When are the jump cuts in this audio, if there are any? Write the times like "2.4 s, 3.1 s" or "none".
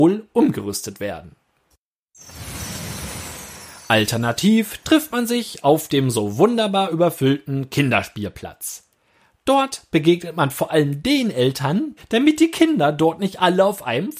12.0 s

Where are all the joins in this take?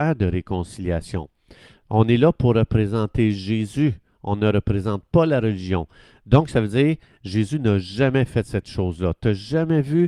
none

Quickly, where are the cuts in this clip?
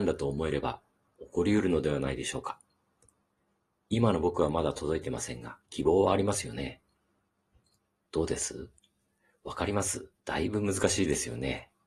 5.6 s, 8.1 s, 10.2 s

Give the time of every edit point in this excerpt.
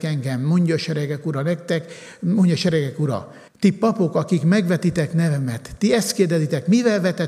3.5 s

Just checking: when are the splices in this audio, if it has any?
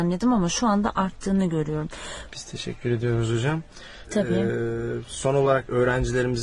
2.3 s, 4.1 s

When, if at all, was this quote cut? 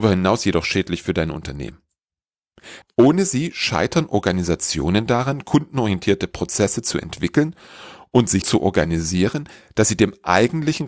2.8 s, 8.4 s

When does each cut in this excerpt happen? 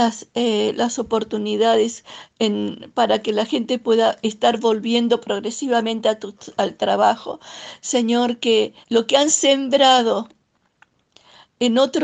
8.8 s

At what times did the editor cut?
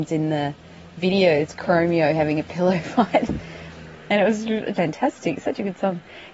4.7 s

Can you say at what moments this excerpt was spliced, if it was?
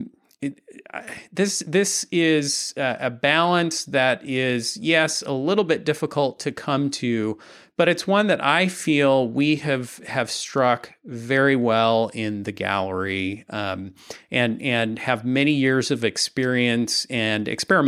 none

